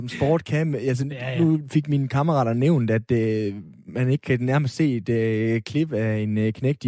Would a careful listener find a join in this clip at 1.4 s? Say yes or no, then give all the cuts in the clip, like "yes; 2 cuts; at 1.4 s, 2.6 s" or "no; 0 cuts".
no; 0 cuts